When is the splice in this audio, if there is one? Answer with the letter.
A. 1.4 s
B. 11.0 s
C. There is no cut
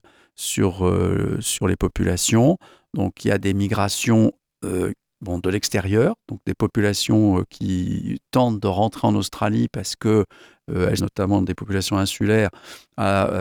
B